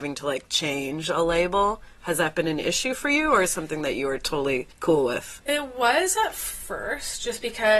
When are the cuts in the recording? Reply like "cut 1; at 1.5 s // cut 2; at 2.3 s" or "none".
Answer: cut 1; at 4.7 s